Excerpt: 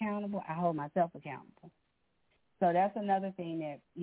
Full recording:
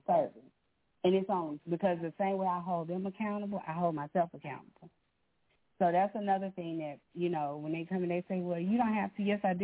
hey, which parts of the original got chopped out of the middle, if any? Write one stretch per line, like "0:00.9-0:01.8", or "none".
none